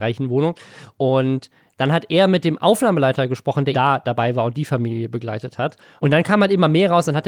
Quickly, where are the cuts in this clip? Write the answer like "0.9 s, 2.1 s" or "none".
3.7 s, 6.0 s